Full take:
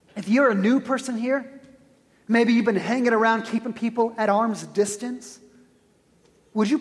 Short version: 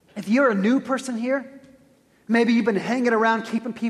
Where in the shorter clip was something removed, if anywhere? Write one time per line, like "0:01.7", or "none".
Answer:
none